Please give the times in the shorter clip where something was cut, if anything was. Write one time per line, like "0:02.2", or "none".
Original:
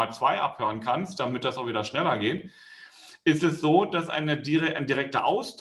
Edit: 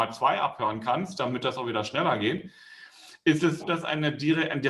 0:03.6

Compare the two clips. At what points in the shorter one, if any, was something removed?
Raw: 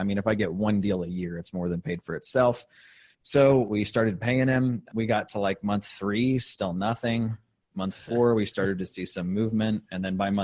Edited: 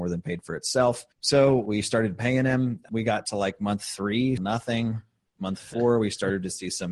0:01.1
0:04.4

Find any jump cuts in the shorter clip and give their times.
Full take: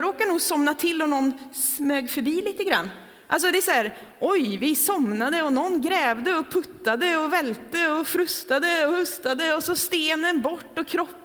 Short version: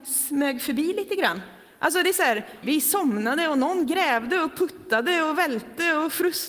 0:02.6

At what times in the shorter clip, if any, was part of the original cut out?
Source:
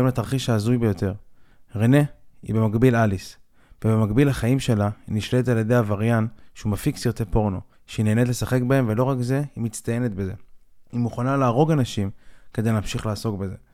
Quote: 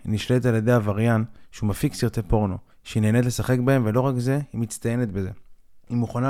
none

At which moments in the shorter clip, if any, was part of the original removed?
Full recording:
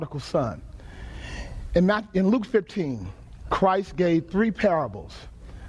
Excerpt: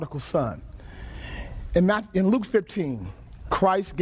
none

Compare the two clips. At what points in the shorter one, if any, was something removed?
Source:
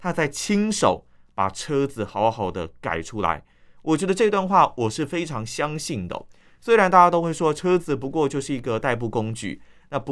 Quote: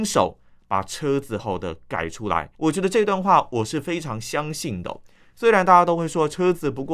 0:01.4
0:02.5

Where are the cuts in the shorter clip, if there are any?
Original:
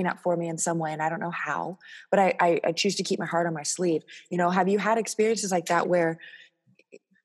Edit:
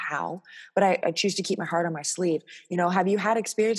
0:01.0

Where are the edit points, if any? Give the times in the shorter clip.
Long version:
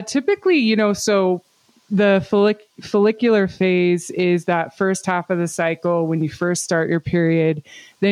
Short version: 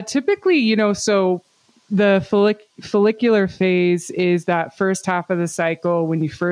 none

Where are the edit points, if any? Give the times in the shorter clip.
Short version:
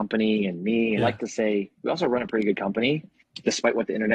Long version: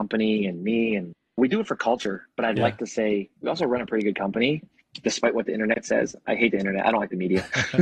0:01.0

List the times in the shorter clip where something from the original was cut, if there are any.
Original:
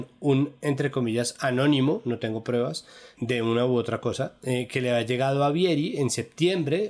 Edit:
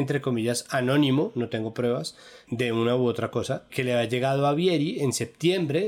0:03.7

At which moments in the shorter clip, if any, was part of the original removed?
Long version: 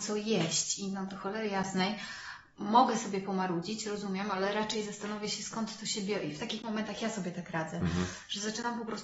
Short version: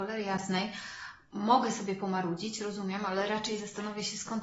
none

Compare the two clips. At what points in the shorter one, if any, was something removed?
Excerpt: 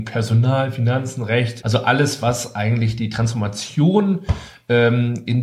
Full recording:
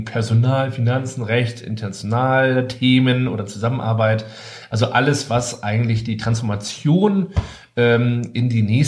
0:01.6

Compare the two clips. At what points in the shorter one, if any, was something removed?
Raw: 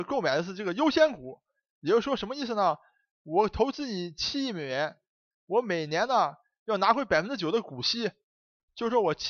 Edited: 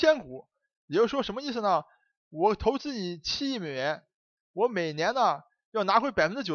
none

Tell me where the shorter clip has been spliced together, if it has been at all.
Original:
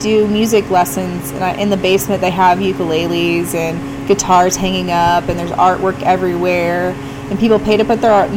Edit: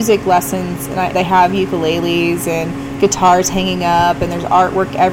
0:01.1

